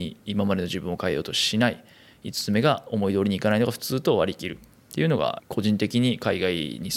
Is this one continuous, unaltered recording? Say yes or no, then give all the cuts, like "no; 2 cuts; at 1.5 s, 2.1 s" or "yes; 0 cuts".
no; 1 cut; at 5.4 s